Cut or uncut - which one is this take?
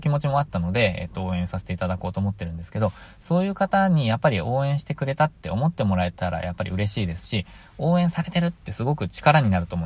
uncut